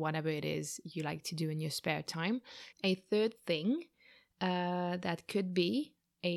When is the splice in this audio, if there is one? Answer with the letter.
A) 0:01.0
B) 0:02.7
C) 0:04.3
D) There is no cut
B